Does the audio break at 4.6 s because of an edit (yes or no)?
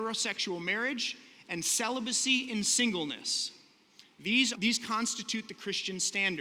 yes